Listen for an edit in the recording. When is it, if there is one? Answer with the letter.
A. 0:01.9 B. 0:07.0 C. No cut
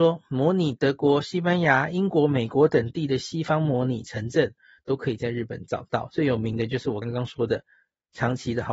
B